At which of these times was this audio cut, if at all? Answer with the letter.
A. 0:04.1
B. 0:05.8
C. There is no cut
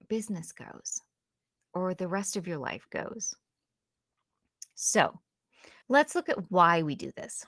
B